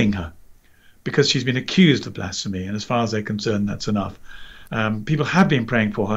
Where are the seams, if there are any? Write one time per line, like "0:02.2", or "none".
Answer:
0:04.7